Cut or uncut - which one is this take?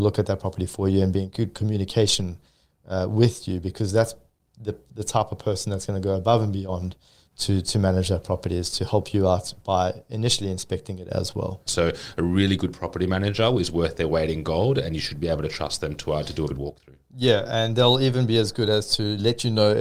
cut